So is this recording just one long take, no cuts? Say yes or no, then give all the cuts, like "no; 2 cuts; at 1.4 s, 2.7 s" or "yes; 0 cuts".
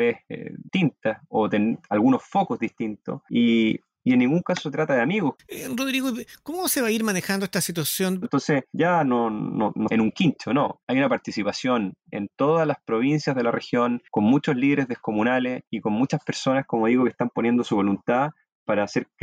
no; 3 cuts; at 5.3 s, 8.2 s, 9.9 s